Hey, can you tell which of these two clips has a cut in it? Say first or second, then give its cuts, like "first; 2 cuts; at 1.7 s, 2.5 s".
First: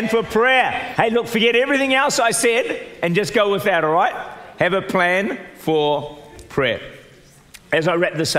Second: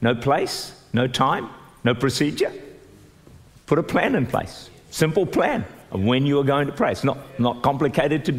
first; 1 cut; at 0.9 s